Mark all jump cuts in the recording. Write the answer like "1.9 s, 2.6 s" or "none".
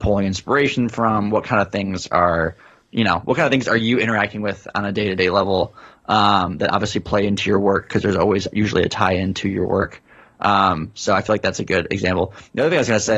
none

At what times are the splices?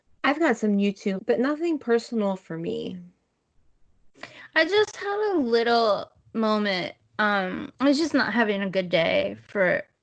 1.2 s, 7.8 s

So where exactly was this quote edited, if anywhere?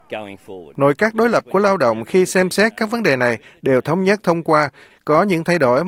4.9 s

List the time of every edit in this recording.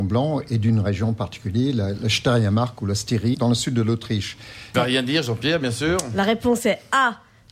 3.3 s, 4.7 s

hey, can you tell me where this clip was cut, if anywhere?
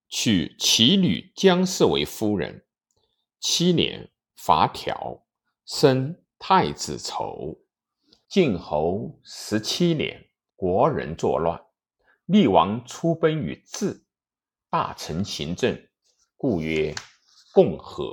8.2 s, 10.5 s

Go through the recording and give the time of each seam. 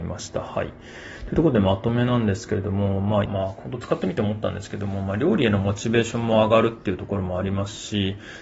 3.3 s

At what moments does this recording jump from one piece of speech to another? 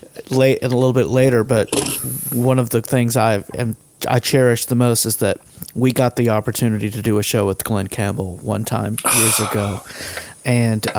none

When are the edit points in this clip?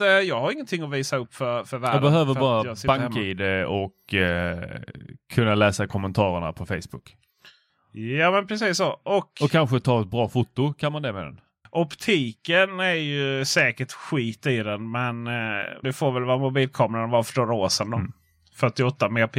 15.8 s

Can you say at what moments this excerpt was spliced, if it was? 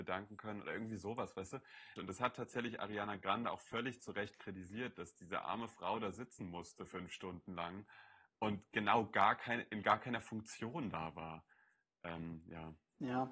2.0 s

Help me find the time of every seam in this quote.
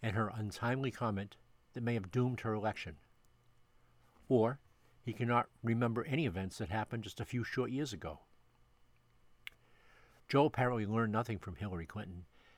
10.2 s

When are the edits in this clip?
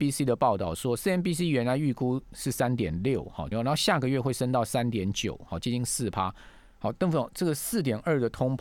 3.5 s, 6.8 s

